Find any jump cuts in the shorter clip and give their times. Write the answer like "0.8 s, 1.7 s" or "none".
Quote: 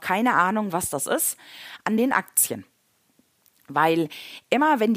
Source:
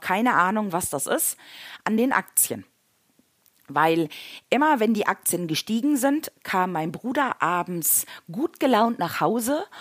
none